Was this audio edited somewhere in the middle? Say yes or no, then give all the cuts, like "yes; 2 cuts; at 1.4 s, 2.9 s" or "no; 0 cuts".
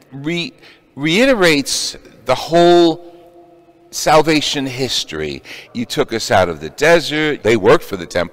yes; 2 cuts; at 5.6 s, 7.4 s